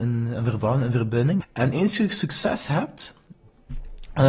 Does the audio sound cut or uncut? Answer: cut